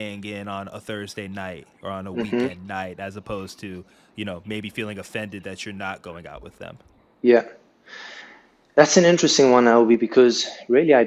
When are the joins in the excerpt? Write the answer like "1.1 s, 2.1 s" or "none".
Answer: none

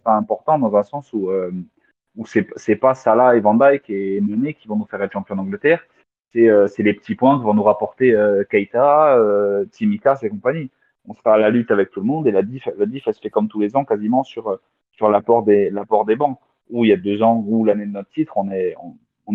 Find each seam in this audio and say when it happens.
none

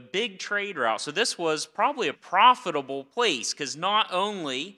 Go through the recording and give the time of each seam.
2.1 s

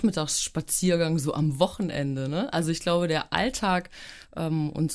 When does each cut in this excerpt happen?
none

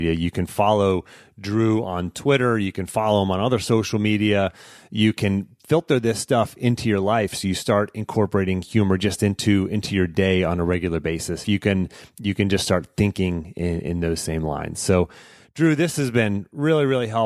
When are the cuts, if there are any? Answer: 11.4 s

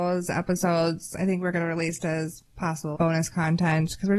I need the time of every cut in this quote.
2.9 s

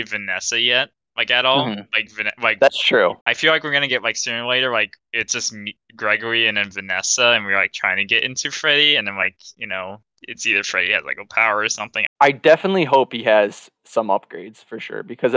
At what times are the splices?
3.2 s, 12.1 s

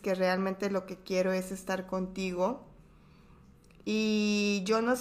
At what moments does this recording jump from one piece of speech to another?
none

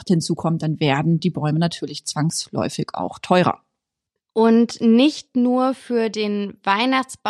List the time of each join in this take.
none

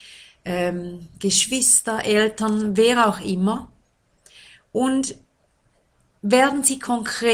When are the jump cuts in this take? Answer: none

